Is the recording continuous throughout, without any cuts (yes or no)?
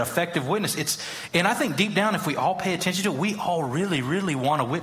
yes